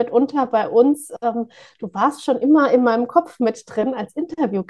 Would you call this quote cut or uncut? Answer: uncut